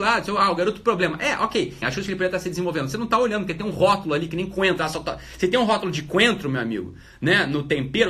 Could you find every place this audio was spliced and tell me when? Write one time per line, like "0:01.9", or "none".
0:01.8